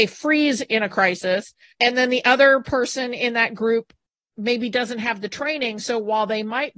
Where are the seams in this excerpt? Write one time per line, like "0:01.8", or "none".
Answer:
none